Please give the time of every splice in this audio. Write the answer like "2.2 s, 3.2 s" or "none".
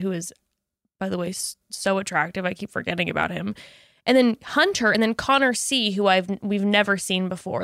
none